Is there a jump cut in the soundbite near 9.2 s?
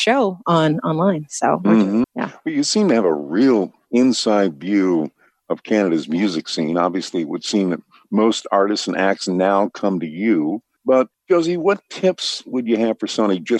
no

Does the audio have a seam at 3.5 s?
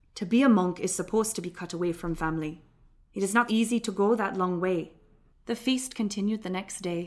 yes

